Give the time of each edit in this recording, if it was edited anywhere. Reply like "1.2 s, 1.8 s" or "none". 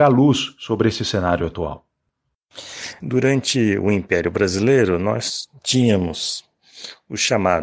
3.0 s